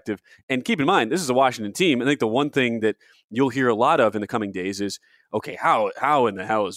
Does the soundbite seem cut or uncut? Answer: uncut